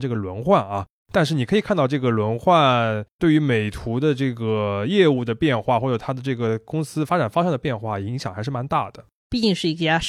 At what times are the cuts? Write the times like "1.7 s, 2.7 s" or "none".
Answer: 9.2 s